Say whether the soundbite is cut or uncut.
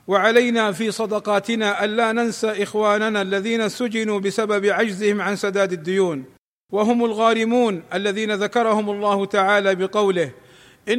uncut